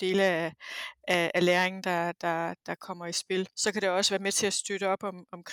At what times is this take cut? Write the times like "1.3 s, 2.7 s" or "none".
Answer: none